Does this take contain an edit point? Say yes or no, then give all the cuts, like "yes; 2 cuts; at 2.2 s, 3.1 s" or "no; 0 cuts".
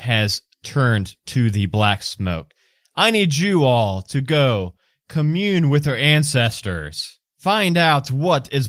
yes; 1 cut; at 7.3 s